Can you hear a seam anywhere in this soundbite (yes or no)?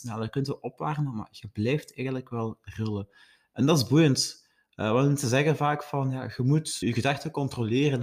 yes